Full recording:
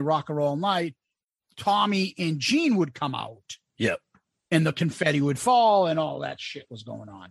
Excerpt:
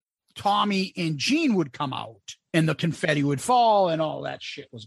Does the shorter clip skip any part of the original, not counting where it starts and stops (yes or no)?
yes